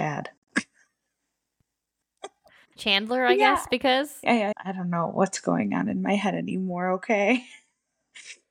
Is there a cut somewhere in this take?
yes; 1 cut; at 4.5 s

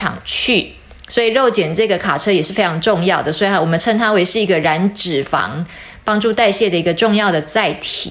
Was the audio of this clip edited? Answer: no; 0 cuts

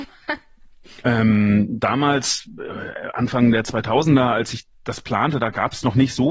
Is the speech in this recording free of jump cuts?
no; 1 cut; at 1.0 s

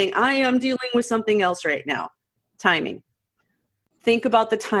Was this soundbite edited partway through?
yes; 1 cut; at 3.8 s

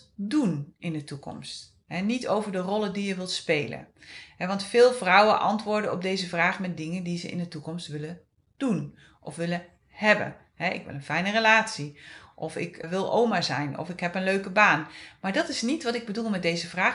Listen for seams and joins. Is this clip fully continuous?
no; 1 cut; at 12.8 s

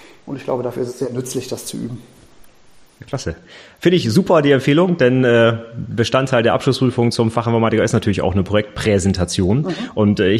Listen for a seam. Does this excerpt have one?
no; 0 cuts

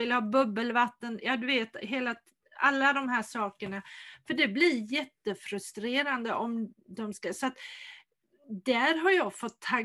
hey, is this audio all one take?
yes; 0 cuts

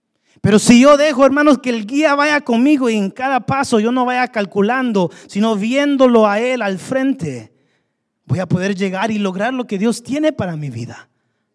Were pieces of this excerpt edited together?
no; 0 cuts

